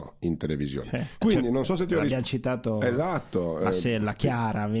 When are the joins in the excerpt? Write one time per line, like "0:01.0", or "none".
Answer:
0:01.2